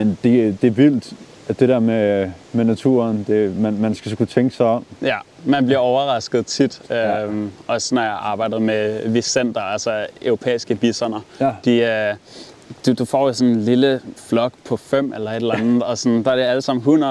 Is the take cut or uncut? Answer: uncut